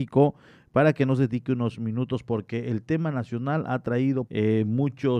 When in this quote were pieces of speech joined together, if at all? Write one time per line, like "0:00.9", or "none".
0:04.3